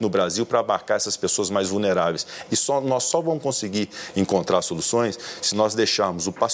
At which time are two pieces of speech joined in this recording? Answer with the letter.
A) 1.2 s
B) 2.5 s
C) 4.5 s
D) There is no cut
B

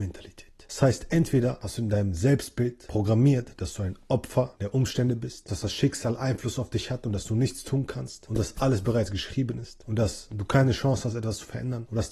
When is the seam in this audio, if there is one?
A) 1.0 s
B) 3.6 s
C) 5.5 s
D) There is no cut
C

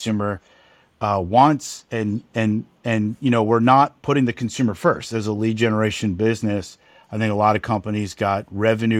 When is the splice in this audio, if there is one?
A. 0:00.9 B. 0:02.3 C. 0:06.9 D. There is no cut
D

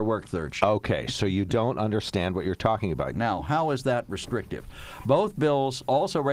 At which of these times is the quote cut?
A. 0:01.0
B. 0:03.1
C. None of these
B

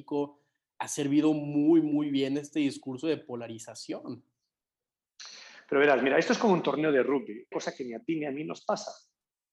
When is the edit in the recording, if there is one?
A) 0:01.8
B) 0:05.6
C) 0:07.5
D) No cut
C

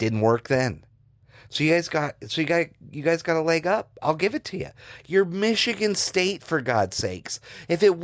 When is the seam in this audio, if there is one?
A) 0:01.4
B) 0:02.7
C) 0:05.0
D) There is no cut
C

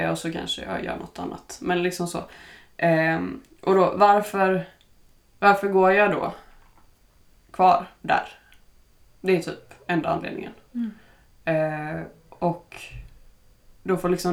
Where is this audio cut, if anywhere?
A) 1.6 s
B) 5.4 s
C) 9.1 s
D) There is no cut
C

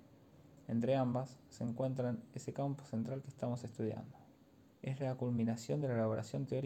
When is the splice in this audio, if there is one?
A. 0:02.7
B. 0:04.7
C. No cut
B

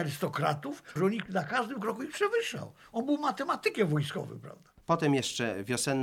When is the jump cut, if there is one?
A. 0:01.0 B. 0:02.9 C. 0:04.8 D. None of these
A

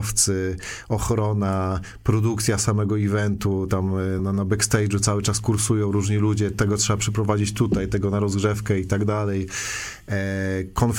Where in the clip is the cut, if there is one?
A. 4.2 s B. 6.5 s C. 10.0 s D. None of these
A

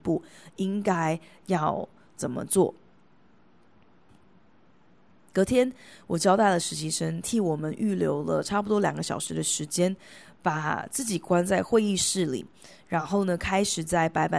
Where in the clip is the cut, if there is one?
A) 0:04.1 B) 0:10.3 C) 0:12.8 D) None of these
A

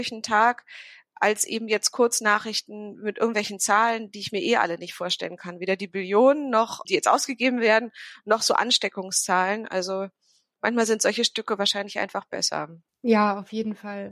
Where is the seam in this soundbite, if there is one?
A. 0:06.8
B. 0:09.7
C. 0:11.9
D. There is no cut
A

